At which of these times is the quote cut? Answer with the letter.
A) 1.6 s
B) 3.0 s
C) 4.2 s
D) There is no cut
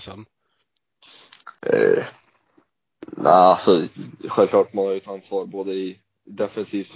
A